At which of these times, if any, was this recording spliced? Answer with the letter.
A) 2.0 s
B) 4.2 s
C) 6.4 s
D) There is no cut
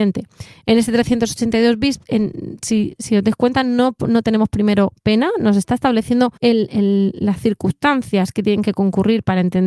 C